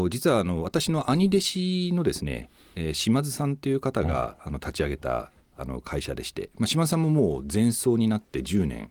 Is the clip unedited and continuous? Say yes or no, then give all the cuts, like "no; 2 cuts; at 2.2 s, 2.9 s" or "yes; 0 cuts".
yes; 0 cuts